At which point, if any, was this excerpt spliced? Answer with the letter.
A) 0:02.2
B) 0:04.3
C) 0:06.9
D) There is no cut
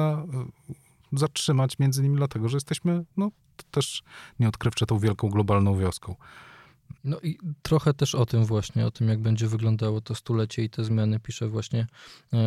C